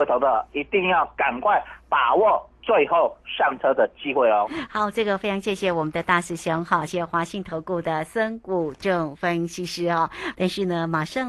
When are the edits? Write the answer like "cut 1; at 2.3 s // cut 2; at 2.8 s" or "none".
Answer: cut 1; at 6.9 s // cut 2; at 10.3 s

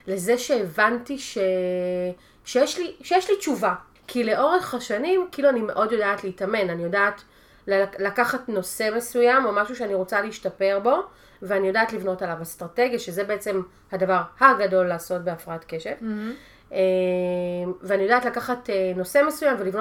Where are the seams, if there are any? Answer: cut 1; at 4.0 s

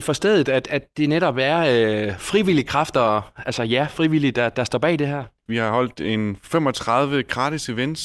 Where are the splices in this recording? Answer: cut 1; at 5.5 s

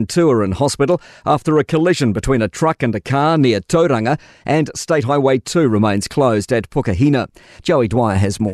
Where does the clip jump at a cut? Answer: cut 1; at 7.6 s

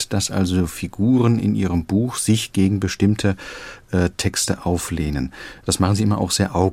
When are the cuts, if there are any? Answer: none

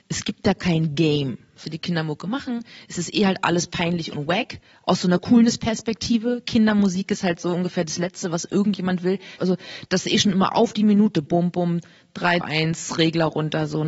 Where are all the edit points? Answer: cut 1; at 1.6 s // cut 2; at 9.4 s // cut 3; at 12.4 s

